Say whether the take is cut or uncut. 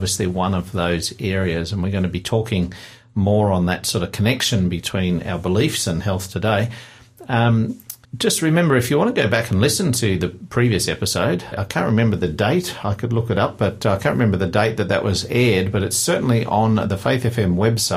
cut